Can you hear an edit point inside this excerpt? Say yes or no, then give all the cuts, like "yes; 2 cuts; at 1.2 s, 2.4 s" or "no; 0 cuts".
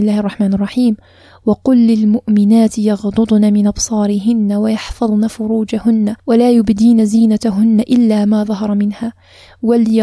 yes; 1 cut; at 6.2 s